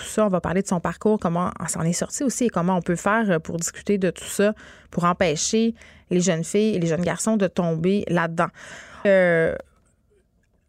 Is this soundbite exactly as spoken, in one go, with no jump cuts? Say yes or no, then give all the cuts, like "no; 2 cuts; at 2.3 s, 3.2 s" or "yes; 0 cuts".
no; 2 cuts; at 1.2 s, 9.0 s